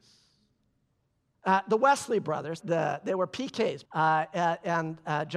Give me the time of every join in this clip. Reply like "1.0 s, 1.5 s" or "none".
1.3 s, 2.6 s, 3.9 s